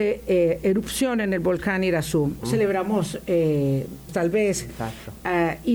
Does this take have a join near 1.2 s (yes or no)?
no